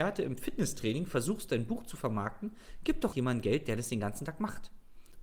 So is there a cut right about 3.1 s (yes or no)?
yes